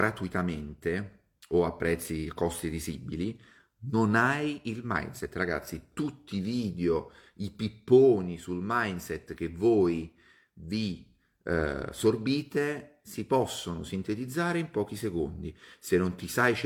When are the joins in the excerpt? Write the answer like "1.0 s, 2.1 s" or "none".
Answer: none